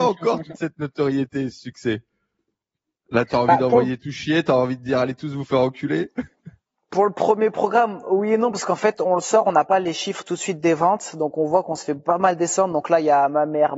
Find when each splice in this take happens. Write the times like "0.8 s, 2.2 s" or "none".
3.3 s

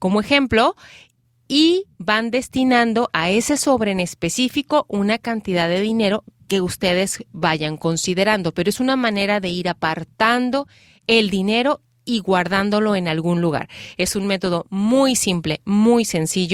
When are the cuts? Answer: none

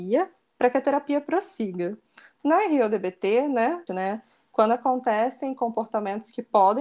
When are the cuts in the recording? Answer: 3.9 s

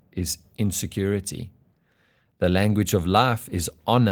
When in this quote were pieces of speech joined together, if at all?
none

